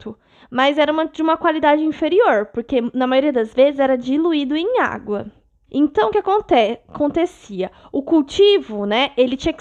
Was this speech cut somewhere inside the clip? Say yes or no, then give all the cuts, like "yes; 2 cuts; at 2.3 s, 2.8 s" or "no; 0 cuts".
yes; 1 cut; at 5.7 s